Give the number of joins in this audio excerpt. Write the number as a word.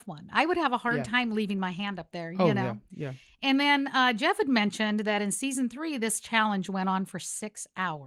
zero